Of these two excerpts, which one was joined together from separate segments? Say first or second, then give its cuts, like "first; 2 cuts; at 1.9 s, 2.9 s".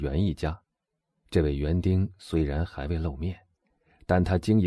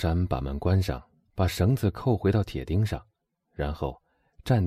first; 1 cut; at 1.2 s